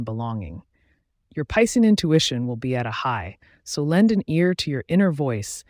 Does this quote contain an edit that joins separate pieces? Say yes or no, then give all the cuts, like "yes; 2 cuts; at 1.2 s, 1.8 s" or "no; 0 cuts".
no; 0 cuts